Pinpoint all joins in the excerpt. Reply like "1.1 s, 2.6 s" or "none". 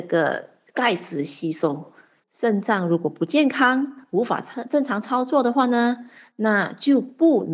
2.2 s